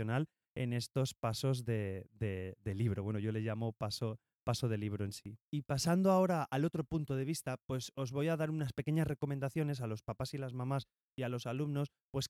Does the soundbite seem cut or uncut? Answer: cut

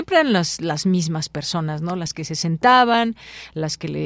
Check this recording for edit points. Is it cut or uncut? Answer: uncut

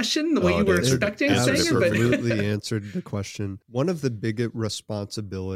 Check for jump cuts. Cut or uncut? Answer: uncut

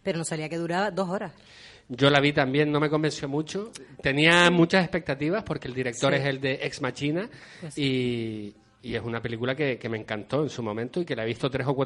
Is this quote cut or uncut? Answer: uncut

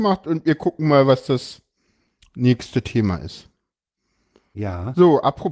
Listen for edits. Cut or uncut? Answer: uncut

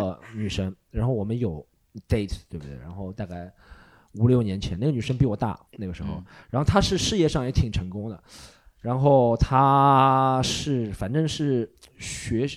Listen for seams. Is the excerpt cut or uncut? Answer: cut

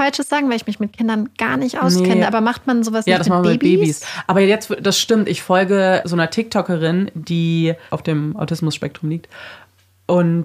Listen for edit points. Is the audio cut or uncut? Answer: uncut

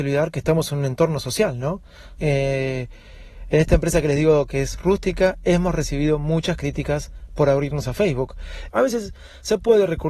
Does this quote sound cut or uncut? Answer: cut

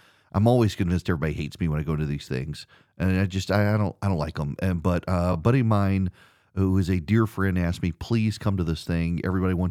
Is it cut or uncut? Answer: uncut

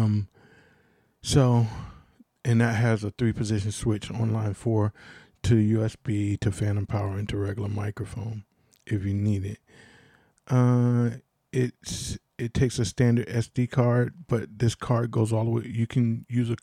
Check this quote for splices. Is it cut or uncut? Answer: uncut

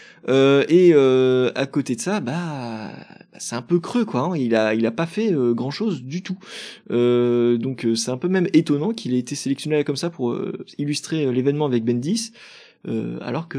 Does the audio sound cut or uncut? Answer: uncut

